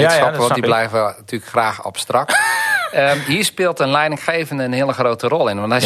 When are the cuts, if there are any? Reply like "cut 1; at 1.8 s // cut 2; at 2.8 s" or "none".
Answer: none